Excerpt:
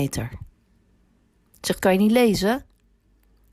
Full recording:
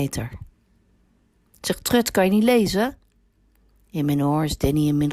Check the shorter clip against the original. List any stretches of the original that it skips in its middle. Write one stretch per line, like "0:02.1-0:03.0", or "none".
0:01.8-0:02.1